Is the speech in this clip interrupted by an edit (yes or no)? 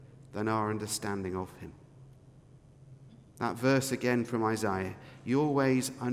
no